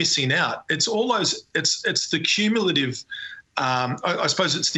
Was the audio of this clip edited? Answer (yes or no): no